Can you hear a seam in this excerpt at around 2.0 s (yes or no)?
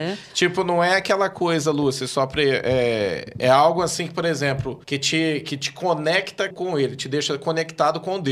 no